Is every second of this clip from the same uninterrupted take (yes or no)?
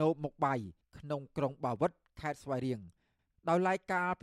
yes